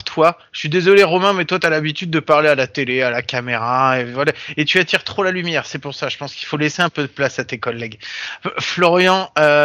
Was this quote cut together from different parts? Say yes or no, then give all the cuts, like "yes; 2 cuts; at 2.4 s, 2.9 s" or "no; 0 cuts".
no; 0 cuts